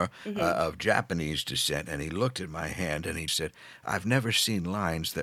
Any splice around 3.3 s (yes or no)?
yes